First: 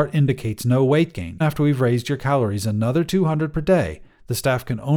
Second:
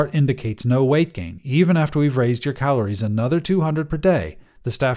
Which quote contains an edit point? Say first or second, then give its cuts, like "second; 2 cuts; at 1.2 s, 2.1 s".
first; 1 cut; at 1.4 s